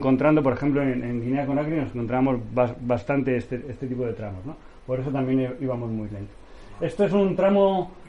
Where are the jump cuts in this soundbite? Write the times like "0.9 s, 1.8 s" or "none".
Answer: none